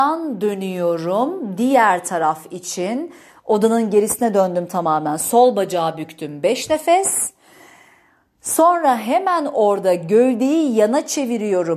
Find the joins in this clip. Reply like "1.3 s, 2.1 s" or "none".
none